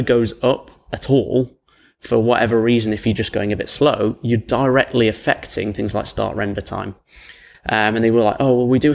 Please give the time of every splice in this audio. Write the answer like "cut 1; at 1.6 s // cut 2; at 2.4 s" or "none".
cut 1; at 7.5 s